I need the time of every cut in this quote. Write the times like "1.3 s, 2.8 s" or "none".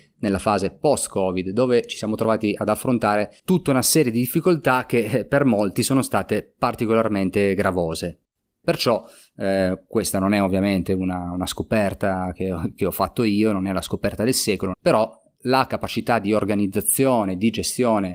8.6 s, 14.7 s